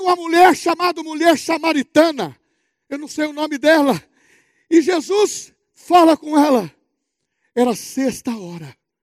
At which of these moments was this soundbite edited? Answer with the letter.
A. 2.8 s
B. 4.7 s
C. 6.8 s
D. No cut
D